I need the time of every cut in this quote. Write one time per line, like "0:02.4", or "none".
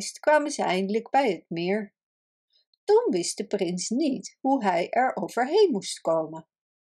none

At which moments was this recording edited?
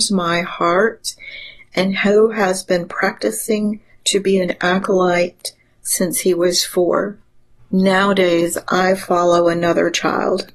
0:07.6

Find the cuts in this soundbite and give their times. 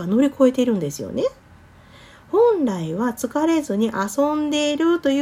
none

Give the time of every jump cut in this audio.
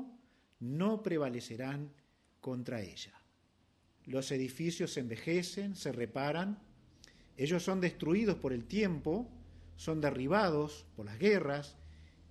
0:04.0

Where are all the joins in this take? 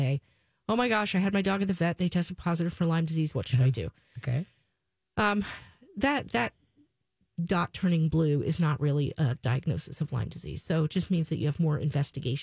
0:03.3

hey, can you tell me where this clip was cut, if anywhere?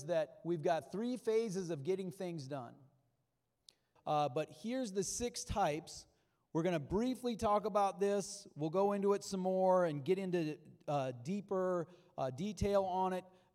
0:04.0

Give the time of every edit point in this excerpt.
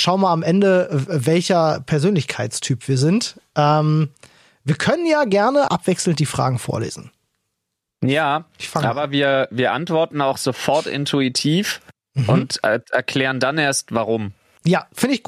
0:05.7

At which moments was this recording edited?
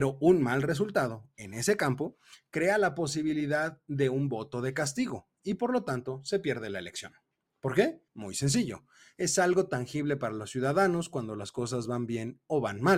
0:08.1

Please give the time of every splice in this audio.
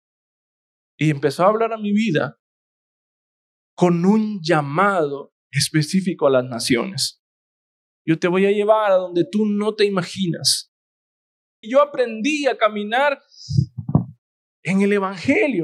0:07.9
0:11.6

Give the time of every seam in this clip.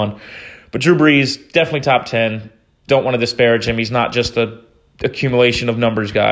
none

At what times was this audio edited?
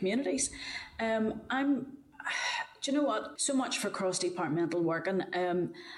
0:03.4

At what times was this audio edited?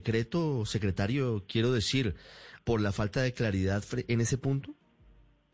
0:02.6

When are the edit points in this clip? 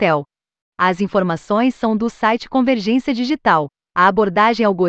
0:03.9

